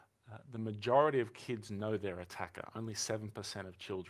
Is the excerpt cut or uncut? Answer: uncut